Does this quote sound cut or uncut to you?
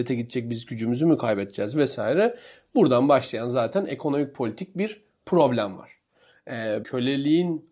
cut